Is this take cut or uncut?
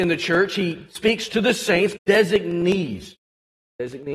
cut